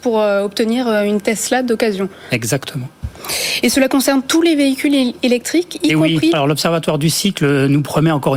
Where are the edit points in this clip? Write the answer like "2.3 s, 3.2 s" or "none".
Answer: 6.3 s